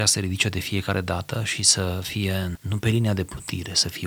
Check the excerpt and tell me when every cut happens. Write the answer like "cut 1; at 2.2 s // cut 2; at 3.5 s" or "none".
cut 1; at 2.5 s